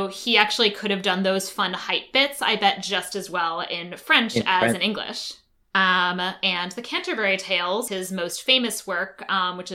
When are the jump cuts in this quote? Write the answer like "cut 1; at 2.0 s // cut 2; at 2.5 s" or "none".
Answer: cut 1; at 5.6 s // cut 2; at 7.9 s